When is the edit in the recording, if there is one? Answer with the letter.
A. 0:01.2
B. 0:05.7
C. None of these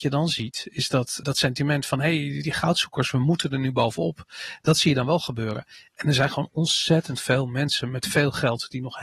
A